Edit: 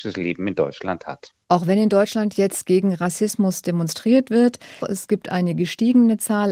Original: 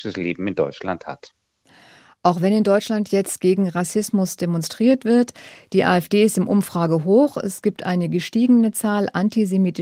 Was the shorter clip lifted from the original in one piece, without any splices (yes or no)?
no